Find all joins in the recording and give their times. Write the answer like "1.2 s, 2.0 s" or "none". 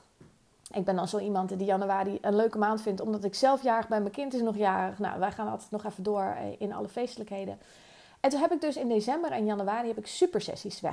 none